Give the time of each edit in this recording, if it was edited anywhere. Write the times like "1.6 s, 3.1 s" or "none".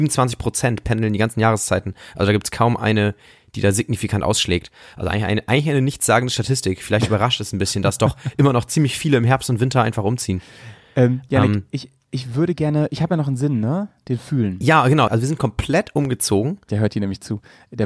15.1 s, 16.7 s